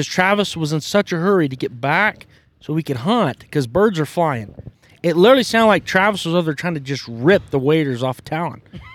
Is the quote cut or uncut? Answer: uncut